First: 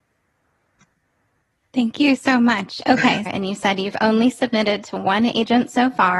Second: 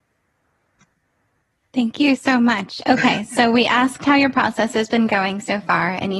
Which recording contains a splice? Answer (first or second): first